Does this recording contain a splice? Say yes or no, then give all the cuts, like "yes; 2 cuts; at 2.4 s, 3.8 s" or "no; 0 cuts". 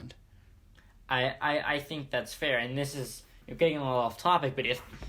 no; 0 cuts